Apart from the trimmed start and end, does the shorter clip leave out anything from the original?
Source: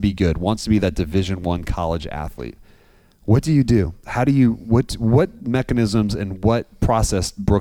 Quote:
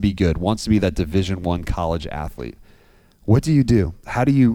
no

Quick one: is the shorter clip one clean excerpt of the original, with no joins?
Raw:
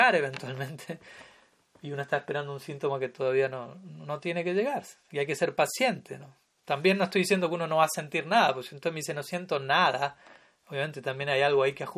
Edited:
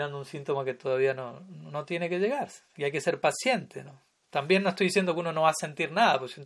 yes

